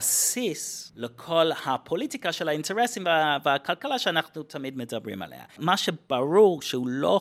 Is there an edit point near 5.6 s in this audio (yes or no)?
yes